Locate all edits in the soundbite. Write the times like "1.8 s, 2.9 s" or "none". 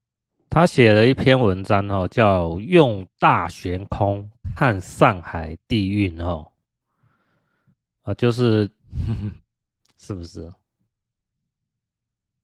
8.8 s